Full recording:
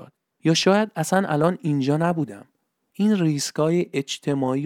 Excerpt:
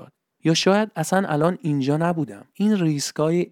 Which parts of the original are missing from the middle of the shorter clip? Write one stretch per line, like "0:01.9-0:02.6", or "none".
0:02.5-0:02.9